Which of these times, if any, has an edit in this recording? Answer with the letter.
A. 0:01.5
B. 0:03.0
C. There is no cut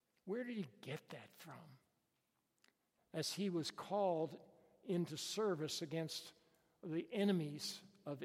B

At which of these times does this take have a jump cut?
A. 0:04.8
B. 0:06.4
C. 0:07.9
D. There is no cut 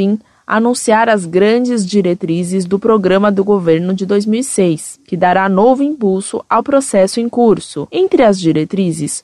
C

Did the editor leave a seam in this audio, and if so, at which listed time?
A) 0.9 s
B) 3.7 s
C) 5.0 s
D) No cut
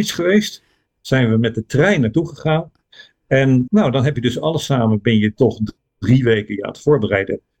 B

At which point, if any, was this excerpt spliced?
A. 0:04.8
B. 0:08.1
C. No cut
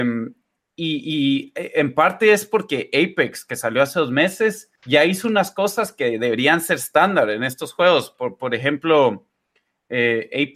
A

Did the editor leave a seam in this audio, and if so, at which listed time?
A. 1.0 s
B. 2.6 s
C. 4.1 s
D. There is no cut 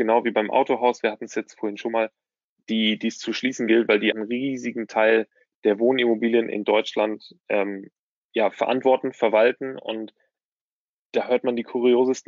C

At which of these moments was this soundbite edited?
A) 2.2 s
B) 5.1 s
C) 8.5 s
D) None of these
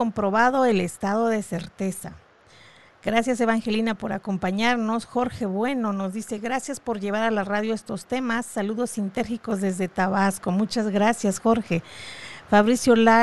D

